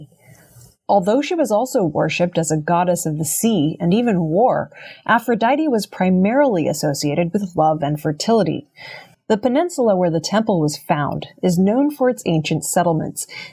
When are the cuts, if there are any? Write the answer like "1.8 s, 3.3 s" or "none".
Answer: 9.1 s